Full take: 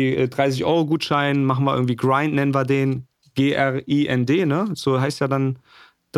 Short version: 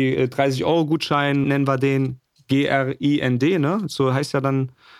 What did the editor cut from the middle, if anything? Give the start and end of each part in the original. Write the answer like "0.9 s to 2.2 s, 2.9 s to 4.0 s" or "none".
1.4 s to 2.3 s